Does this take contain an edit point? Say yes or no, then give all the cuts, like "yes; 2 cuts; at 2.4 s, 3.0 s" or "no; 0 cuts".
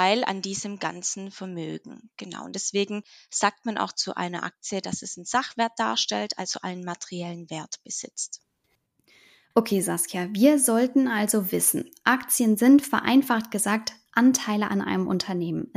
no; 0 cuts